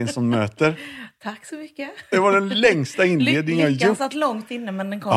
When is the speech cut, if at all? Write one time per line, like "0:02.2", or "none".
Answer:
none